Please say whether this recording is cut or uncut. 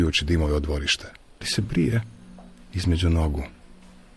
cut